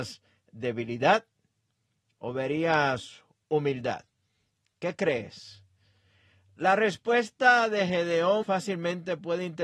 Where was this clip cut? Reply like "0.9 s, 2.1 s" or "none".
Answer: 8.4 s